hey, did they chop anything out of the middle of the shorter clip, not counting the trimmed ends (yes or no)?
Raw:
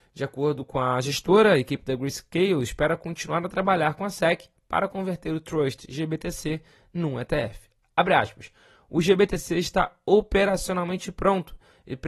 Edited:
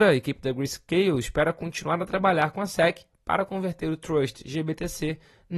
no